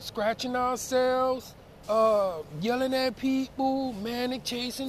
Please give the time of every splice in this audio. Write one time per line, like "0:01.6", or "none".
0:01.8